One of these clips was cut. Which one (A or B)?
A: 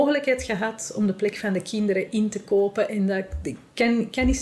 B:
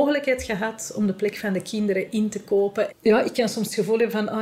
B